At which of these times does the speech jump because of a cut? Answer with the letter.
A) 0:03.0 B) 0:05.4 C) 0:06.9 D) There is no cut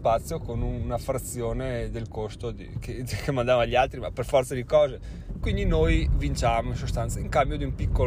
B